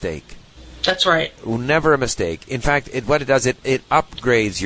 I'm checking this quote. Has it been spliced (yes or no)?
no